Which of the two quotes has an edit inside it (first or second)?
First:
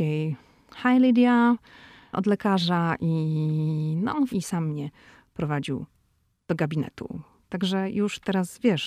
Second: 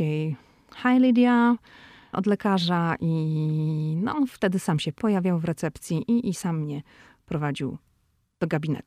first